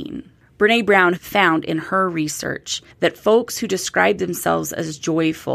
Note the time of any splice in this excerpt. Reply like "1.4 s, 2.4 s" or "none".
1.2 s, 2.9 s